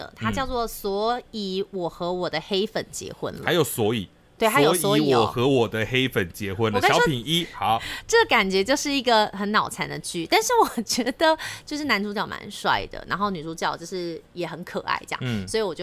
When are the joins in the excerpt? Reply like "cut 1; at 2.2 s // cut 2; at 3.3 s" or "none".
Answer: none

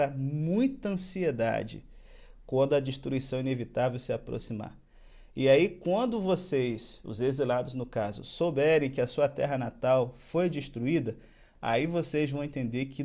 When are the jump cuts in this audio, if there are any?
none

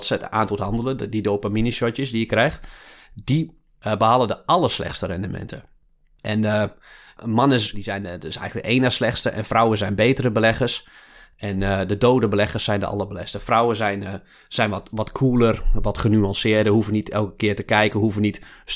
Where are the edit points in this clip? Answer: cut 1; at 7.7 s

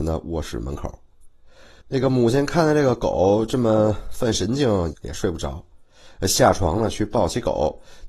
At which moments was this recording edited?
cut 1; at 1.8 s // cut 2; at 4.9 s

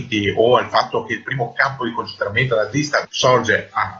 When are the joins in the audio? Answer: cut 1; at 3.0 s

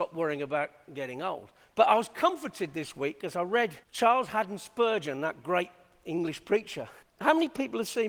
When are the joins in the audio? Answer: cut 1; at 1.7 s // cut 2; at 3.8 s // cut 3; at 7.0 s

